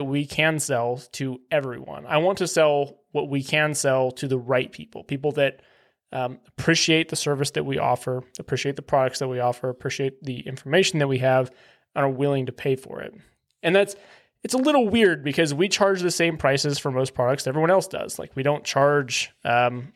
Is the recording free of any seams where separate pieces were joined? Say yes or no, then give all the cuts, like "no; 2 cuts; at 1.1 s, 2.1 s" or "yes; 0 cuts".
yes; 0 cuts